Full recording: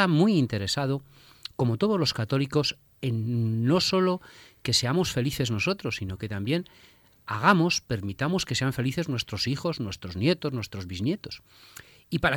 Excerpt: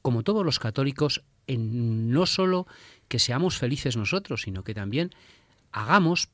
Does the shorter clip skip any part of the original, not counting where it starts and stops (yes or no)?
no